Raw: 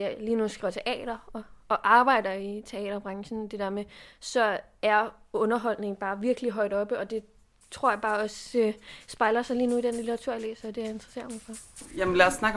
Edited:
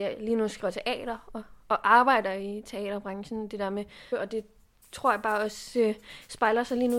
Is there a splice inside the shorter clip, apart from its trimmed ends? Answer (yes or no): yes